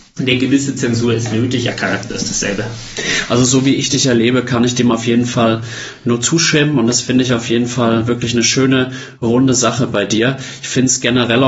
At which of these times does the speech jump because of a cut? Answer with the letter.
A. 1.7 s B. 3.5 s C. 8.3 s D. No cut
A